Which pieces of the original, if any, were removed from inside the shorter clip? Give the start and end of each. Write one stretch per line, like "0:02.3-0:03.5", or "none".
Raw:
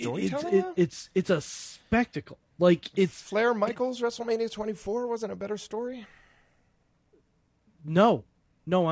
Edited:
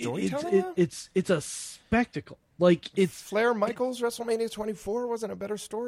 none